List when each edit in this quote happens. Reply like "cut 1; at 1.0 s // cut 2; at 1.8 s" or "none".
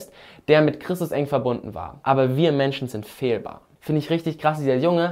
cut 1; at 2.0 s // cut 2; at 3.7 s